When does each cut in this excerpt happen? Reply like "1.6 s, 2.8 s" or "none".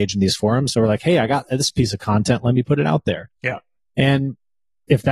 none